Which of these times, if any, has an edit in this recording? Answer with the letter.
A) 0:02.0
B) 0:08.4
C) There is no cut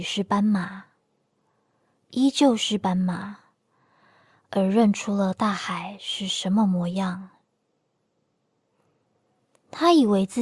C